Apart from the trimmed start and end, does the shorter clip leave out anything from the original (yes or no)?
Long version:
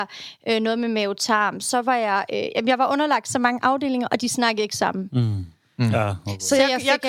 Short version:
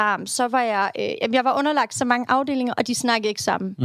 no